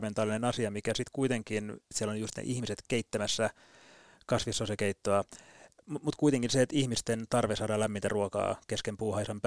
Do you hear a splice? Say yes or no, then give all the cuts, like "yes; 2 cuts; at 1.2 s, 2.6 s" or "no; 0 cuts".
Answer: yes; 1 cut; at 1.9 s